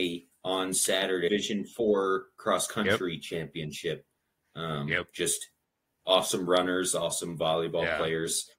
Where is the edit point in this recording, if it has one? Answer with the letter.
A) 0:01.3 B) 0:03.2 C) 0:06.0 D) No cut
A